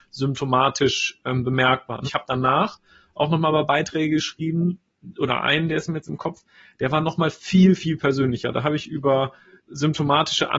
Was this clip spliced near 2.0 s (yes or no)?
yes